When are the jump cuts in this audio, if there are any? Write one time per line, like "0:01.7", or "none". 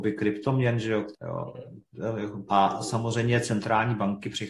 0:01.1
0:02.5